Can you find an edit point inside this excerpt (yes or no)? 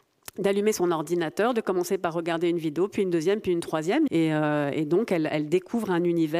yes